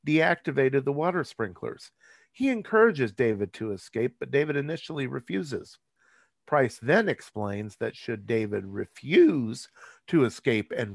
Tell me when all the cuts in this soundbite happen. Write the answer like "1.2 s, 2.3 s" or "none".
none